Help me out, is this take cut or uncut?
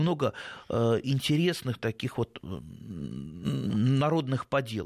uncut